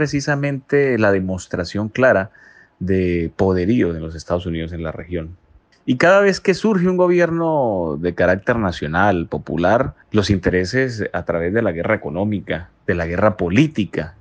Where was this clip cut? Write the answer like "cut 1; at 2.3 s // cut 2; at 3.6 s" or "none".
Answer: cut 1; at 5.7 s // cut 2; at 10.0 s // cut 3; at 12.8 s